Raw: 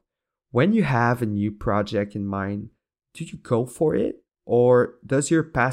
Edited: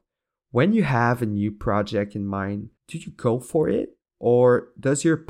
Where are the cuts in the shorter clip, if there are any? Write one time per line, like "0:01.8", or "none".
0:02.8